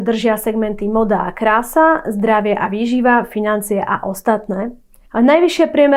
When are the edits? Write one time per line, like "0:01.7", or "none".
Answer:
0:05.0